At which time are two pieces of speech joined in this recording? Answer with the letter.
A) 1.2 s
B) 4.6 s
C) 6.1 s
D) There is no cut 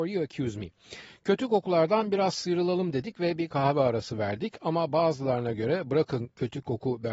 D